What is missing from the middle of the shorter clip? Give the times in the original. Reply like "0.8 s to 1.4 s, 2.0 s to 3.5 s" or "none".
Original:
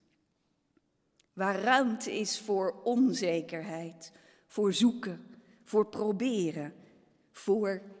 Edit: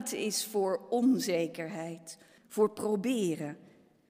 4.3 s to 5.5 s